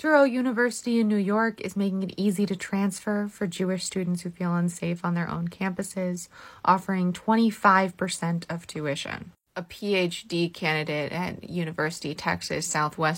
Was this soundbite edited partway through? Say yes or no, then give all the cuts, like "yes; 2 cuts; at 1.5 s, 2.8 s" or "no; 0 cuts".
no; 0 cuts